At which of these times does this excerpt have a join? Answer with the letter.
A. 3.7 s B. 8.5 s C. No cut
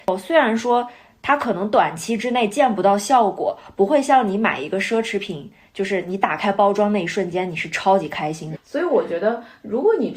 B